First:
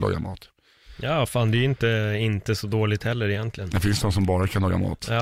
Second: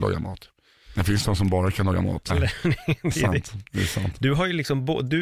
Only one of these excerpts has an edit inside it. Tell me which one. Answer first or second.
second